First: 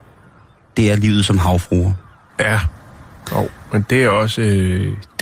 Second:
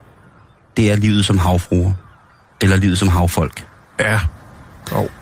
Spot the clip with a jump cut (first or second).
first